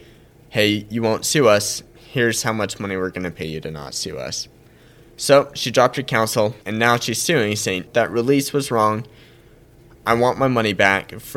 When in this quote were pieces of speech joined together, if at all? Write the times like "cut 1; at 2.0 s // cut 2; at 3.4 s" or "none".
cut 1; at 6.6 s // cut 2; at 7.9 s